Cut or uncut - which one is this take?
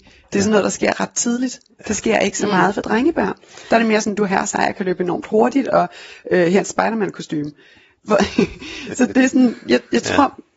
uncut